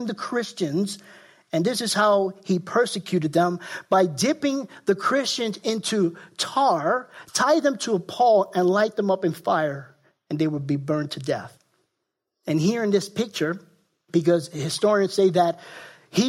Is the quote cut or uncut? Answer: uncut